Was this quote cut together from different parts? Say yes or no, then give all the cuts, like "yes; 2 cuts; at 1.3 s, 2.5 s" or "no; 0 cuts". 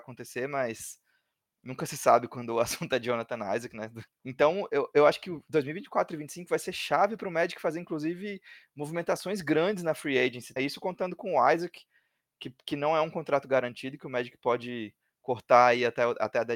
yes; 2 cuts; at 4.1 s, 10.6 s